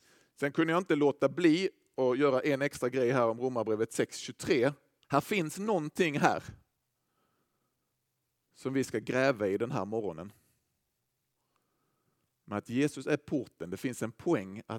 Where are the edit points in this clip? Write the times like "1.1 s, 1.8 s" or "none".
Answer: 5.0 s